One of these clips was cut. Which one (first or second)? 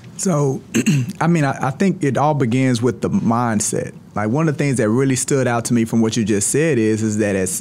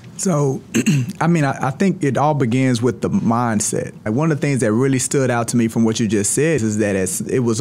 second